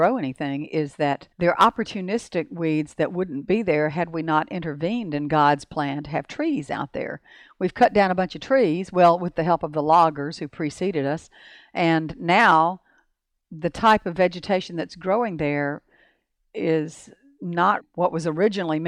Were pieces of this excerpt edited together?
yes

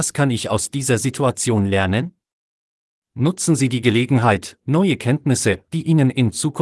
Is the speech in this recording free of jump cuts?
no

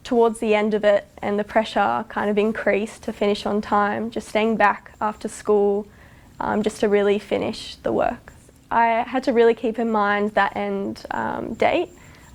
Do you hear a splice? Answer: no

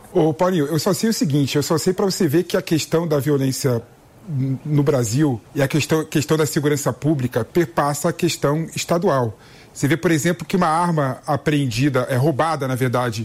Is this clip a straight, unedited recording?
no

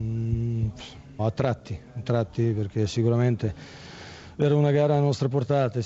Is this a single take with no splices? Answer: no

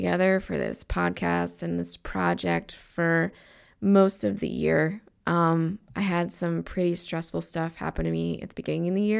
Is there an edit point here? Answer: no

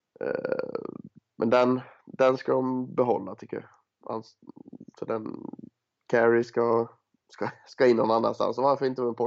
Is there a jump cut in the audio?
no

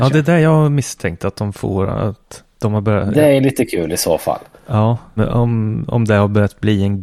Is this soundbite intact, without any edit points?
no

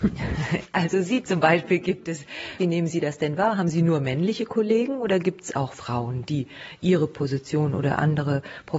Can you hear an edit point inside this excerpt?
yes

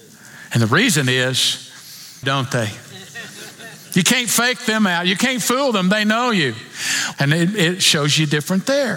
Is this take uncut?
no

